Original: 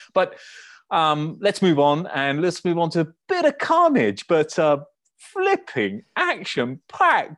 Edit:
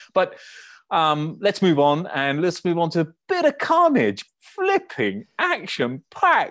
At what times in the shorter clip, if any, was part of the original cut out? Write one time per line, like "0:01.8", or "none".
0:04.3